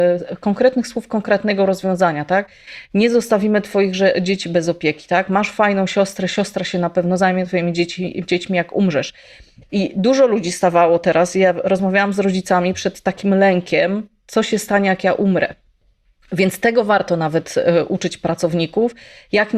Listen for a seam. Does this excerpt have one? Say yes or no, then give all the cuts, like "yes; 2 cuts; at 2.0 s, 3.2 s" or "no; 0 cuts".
no; 0 cuts